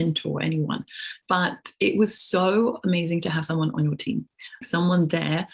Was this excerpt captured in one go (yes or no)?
no